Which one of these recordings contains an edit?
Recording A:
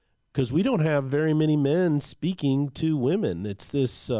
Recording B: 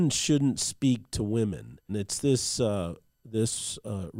B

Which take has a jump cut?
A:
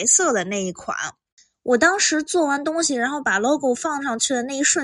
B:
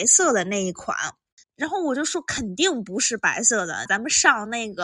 B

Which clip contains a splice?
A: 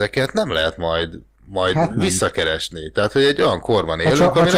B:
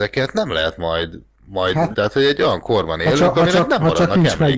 B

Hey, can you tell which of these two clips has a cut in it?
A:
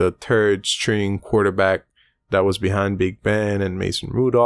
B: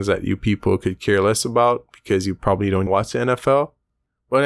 B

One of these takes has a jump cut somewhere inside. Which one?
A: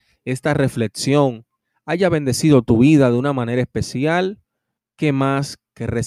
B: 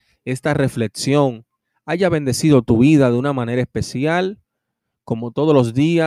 A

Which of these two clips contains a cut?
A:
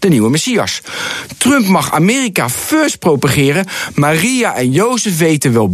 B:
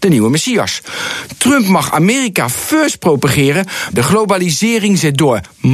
B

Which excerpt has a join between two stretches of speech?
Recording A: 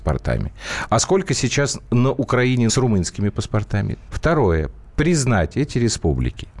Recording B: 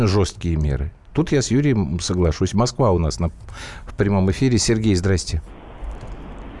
A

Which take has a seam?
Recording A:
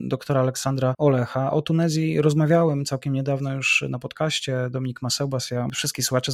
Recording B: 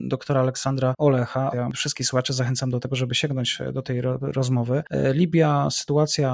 B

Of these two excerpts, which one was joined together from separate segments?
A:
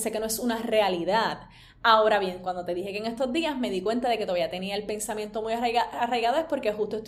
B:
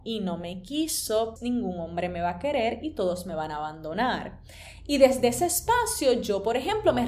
B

